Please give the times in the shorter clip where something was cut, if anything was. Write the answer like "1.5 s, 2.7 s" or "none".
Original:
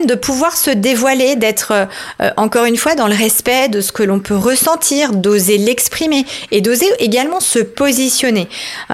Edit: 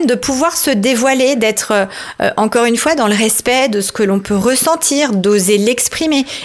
none